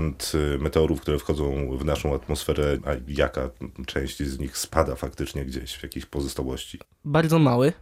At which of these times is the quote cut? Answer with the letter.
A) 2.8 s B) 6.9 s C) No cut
A